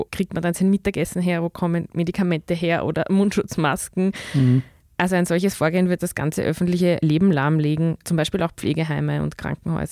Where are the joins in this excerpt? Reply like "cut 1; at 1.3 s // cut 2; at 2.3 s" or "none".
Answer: cut 1; at 6.0 s